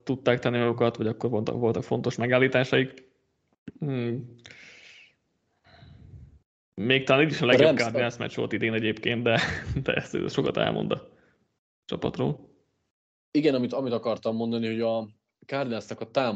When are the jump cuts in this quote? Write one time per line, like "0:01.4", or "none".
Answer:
none